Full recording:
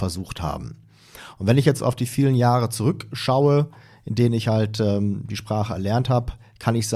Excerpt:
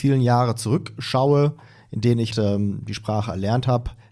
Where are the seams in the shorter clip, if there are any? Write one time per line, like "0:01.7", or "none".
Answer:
0:02.3

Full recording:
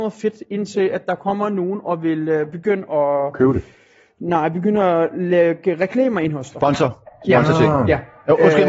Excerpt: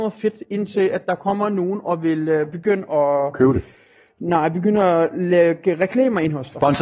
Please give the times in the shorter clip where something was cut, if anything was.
none

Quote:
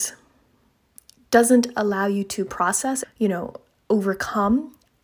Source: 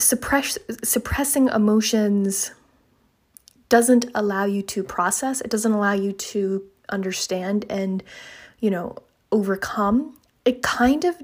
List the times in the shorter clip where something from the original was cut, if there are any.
0:03.0

